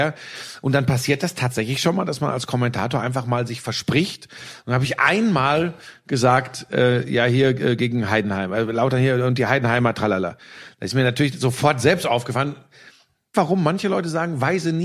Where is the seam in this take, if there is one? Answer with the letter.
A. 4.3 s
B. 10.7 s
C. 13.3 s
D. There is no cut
C